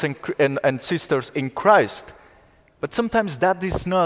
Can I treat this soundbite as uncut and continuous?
yes; 0 cuts

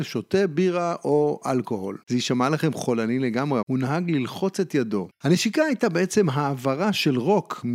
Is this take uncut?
no; 3 cuts; at 2.0 s, 3.6 s, 5.1 s

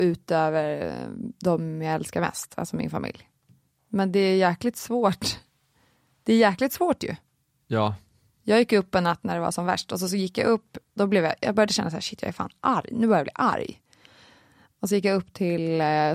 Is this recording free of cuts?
yes; 0 cuts

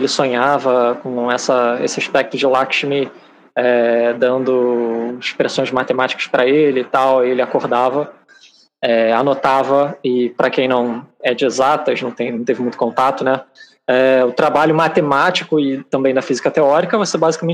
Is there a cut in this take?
no; 0 cuts

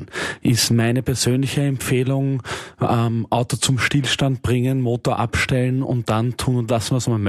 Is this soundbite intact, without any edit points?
yes; 0 cuts

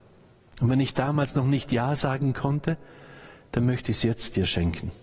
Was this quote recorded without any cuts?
yes; 0 cuts

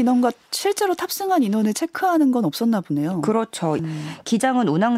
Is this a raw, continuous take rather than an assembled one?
no; 1 cut; at 3.8 s

